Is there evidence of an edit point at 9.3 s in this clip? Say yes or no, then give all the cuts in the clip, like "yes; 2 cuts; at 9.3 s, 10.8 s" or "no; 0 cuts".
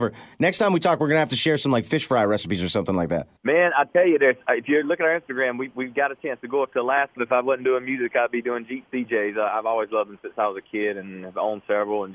no; 2 cuts; at 3.4 s, 7.2 s